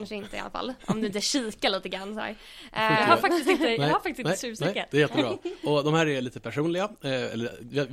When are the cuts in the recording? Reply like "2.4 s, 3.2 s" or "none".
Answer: none